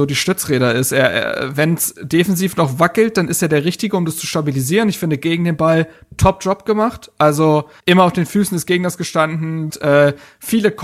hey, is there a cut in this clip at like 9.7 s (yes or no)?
yes